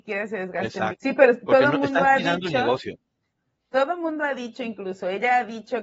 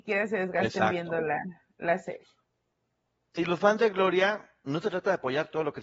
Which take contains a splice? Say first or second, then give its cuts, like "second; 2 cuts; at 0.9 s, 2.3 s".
first; 1 cut; at 0.9 s